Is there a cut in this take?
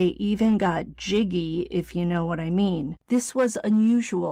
yes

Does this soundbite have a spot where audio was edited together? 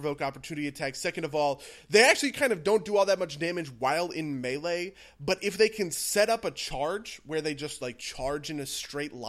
no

